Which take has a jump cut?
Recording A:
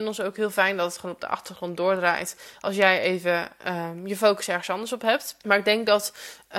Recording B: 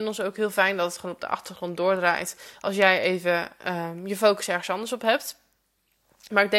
A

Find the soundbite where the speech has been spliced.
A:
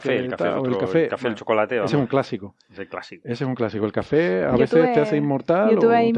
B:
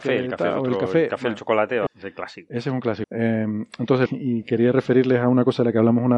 B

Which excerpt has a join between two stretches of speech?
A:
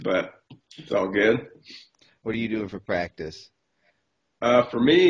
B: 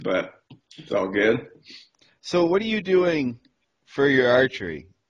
A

